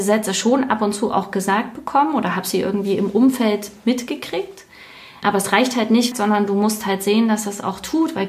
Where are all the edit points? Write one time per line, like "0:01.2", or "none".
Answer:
0:06.1

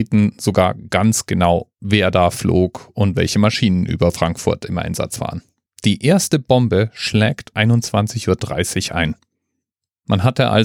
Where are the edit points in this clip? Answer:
0:05.7
0:07.5

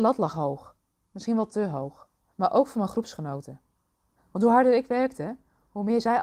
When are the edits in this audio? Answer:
0:02.3
0:04.2

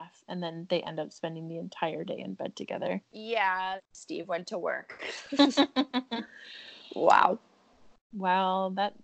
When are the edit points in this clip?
0:03.8

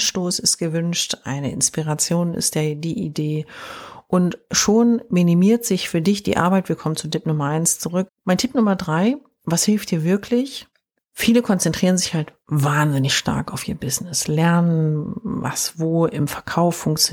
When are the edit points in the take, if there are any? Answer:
0:08.1
0:11.0

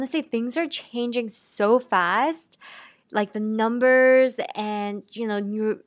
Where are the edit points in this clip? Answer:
none

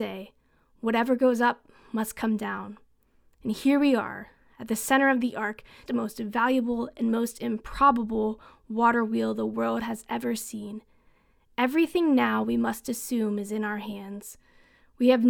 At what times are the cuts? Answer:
0:05.9

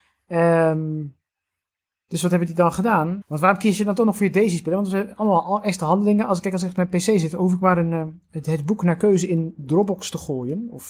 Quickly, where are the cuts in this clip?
0:03.2

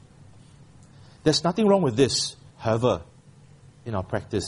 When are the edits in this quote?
0:02.5

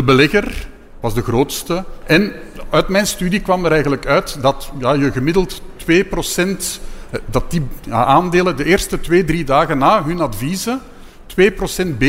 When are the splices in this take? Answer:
0:02.0

